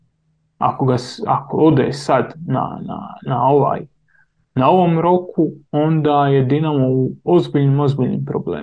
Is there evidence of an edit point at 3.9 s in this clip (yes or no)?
no